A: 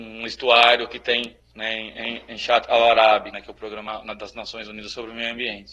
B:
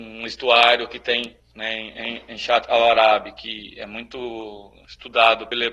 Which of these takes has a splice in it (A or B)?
A